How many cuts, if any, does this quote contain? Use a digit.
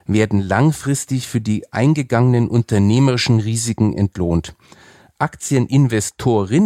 0